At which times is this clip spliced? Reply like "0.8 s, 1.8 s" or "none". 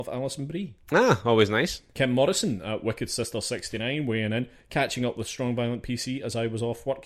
none